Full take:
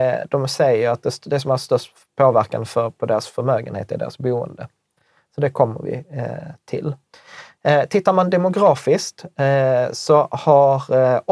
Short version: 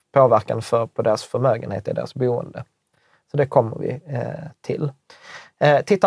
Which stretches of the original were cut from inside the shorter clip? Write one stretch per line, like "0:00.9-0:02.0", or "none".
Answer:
none